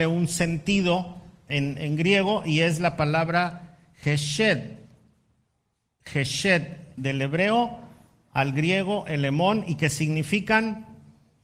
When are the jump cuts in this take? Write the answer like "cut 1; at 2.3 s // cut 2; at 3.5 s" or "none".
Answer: cut 1; at 7.0 s